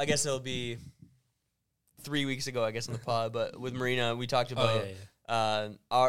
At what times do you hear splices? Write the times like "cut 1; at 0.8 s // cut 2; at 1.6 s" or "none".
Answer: none

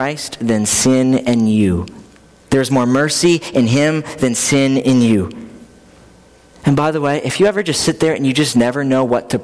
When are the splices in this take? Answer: cut 1; at 6.5 s

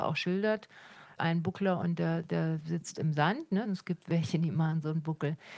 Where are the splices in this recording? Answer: cut 1; at 1.2 s // cut 2; at 3.6 s

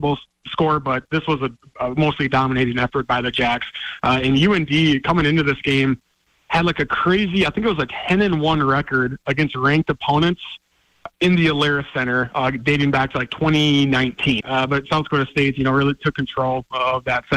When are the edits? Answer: cut 1; at 14.4 s

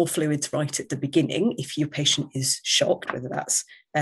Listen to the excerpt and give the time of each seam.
cut 1; at 3.1 s

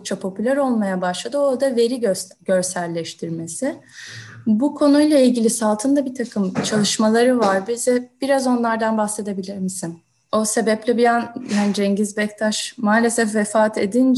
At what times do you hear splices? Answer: cut 1; at 10.3 s

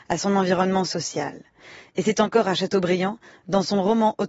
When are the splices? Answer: none

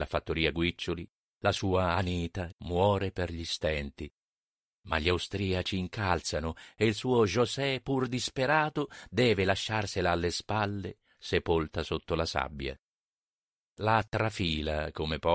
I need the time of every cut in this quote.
cut 1; at 2.5 s

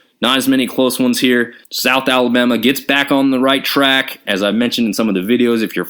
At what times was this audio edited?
cut 1; at 1.6 s // cut 2; at 4.3 s

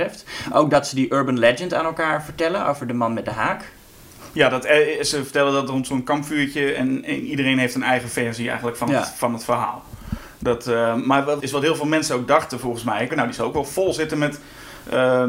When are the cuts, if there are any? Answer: cut 1; at 11.4 s // cut 2; at 13.1 s

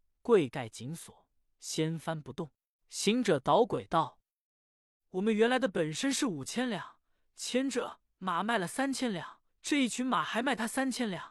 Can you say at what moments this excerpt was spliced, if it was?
cut 1; at 2.8 s // cut 2; at 9.5 s

